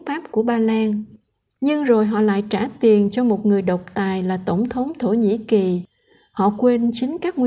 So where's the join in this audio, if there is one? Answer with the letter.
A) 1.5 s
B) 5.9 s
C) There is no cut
C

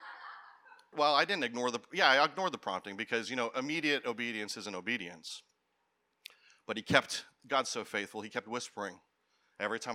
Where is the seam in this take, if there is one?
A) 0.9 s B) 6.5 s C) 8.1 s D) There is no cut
A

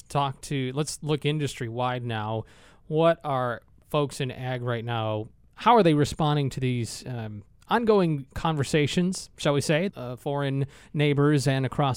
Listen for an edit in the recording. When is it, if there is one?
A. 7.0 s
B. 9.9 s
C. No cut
B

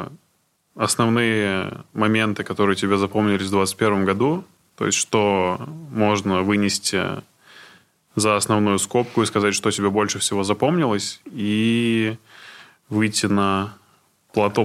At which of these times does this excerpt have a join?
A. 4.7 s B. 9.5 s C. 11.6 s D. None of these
D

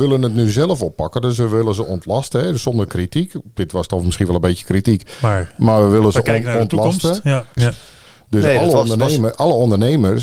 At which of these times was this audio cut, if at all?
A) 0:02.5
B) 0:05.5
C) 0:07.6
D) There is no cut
C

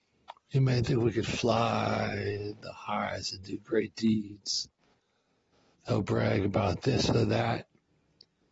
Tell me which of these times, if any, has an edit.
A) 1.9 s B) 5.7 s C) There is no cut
B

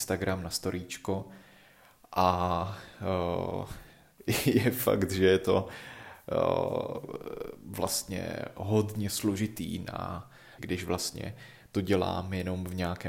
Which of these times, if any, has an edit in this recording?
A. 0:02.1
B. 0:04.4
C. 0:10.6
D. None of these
C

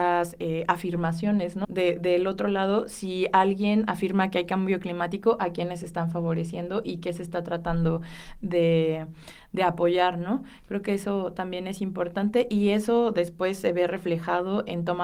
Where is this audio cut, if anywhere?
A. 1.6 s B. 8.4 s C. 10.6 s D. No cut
A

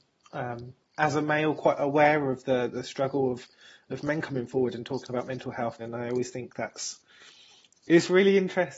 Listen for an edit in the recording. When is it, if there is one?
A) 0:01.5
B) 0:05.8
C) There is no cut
B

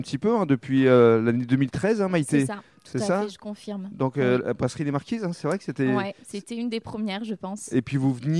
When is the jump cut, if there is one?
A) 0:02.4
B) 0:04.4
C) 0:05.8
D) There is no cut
D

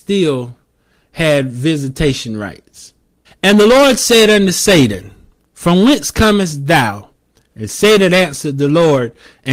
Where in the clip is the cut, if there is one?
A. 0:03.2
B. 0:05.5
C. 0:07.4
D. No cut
A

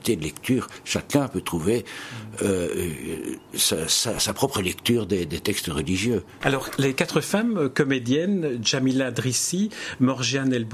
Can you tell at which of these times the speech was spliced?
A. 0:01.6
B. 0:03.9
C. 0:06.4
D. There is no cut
C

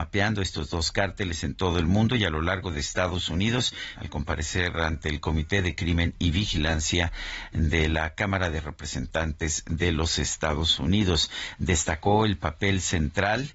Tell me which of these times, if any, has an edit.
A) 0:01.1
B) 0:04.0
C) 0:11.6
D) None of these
B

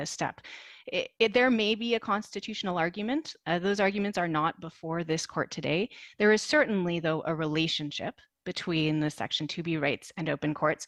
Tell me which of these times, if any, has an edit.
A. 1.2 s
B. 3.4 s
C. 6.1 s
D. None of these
A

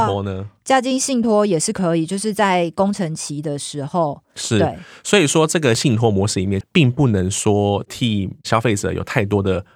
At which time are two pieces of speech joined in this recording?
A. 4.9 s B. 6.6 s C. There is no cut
B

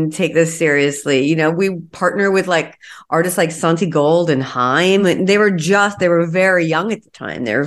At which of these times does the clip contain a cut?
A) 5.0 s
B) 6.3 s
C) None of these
C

